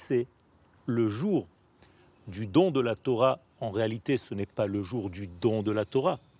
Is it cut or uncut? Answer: uncut